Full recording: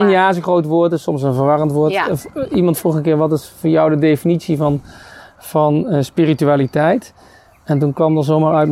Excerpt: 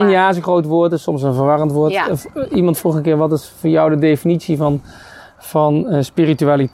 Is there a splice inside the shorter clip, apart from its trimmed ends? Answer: no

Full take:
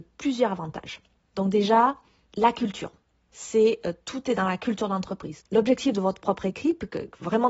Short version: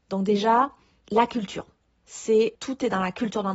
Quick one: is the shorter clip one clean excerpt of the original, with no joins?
no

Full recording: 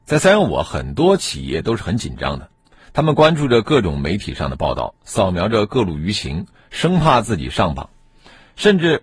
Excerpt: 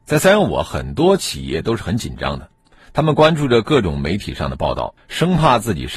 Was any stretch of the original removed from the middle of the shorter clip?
yes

